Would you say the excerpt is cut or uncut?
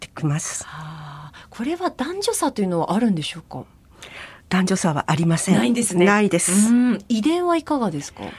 uncut